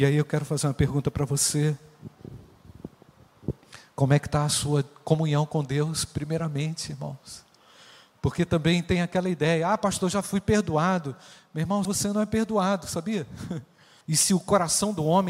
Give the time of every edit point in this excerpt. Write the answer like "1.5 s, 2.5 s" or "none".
11.9 s, 14.0 s